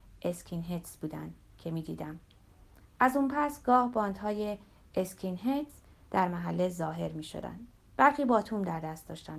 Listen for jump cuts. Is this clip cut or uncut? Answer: uncut